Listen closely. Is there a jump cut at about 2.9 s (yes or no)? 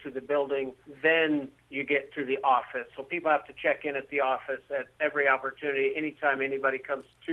yes